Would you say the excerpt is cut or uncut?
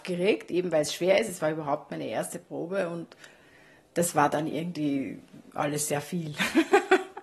uncut